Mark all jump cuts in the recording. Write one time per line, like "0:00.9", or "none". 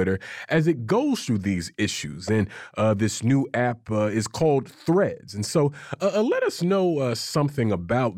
none